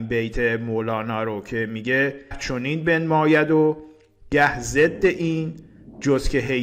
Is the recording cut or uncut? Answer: cut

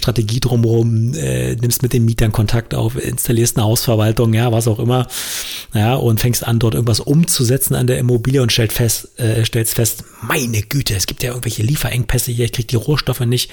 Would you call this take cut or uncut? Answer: uncut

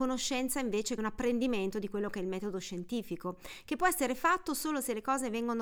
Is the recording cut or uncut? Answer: cut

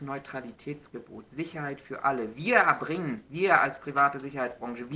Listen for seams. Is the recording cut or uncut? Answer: uncut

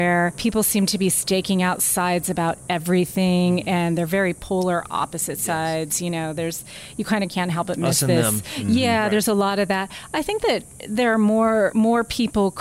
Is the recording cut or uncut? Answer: uncut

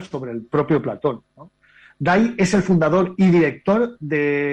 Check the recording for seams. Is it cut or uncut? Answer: uncut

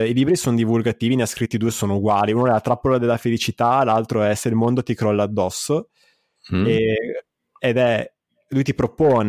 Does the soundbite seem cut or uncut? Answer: uncut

